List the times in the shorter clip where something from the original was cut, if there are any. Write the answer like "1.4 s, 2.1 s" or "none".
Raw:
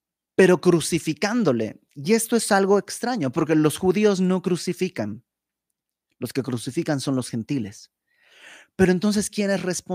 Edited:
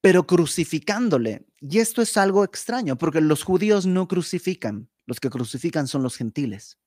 5.0 s